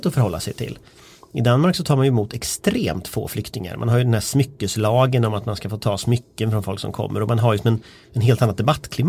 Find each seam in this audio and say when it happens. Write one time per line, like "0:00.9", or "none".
none